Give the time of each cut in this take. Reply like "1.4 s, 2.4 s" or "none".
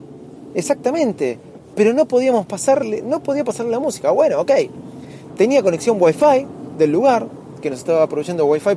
5.3 s